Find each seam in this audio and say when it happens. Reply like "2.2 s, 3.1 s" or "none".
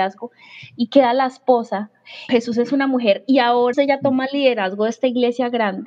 2.3 s, 3.7 s